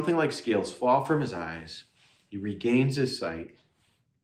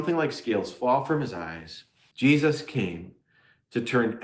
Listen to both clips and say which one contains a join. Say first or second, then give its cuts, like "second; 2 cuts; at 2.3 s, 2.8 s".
second; 1 cut; at 2.1 s